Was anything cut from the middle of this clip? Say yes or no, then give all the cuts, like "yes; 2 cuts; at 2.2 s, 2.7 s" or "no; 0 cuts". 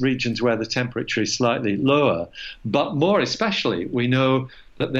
no; 0 cuts